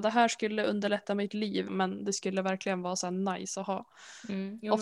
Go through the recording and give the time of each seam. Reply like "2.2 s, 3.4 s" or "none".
1.7 s